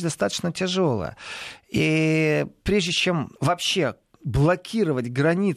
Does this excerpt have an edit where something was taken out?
yes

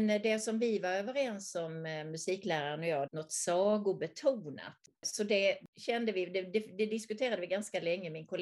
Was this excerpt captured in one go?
no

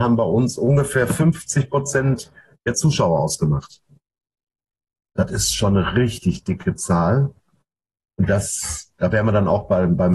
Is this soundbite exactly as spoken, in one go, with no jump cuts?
yes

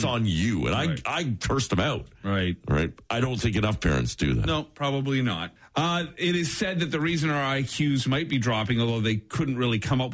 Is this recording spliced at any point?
yes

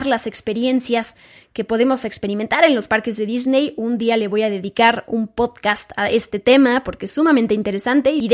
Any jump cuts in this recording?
no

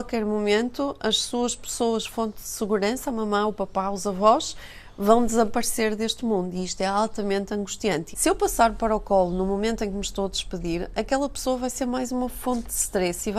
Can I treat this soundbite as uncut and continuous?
no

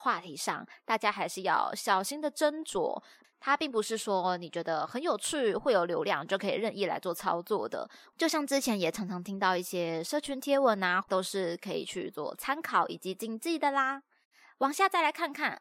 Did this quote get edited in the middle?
yes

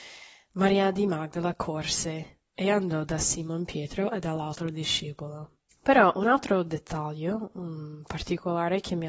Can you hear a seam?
yes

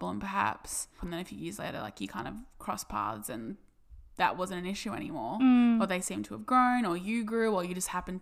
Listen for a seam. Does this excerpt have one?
yes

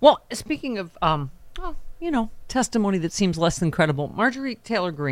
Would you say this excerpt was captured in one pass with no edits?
yes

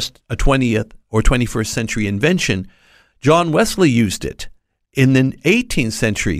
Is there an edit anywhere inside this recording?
no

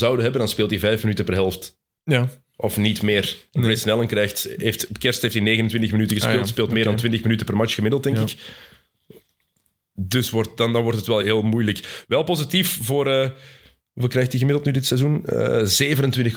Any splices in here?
yes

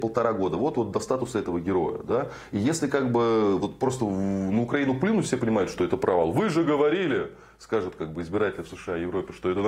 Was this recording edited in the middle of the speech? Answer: no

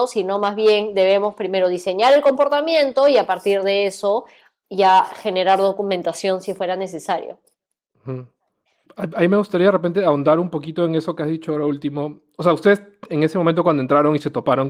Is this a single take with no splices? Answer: yes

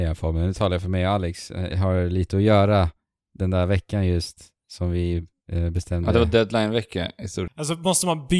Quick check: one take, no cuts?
no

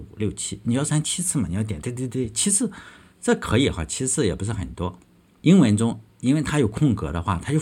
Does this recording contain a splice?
yes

